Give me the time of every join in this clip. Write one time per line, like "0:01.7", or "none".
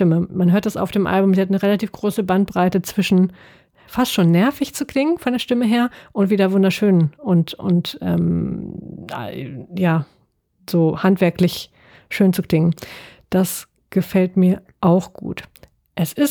none